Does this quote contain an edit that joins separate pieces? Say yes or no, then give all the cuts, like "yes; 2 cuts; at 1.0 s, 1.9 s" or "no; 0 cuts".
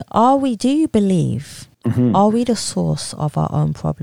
yes; 1 cut; at 1.7 s